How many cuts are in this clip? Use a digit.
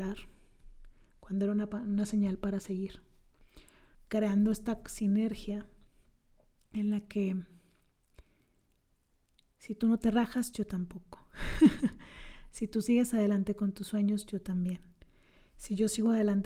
1